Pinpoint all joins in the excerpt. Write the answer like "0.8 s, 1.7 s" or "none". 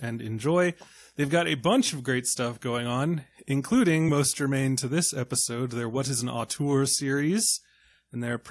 none